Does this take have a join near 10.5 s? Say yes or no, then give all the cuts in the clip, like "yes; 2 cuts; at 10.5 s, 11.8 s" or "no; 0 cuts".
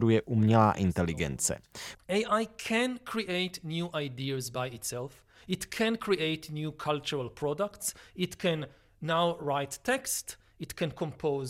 no; 1 cut; at 1.9 s